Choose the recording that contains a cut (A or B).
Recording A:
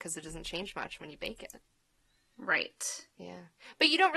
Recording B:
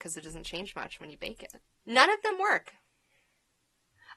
B